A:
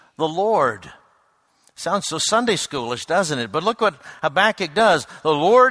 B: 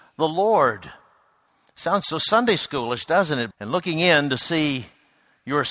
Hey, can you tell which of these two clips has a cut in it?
B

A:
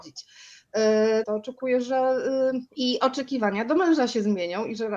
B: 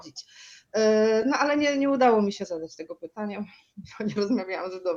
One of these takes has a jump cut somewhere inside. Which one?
A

